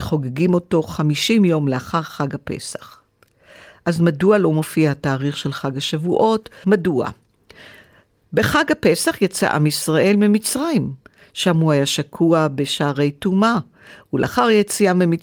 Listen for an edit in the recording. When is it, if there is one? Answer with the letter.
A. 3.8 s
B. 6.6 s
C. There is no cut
B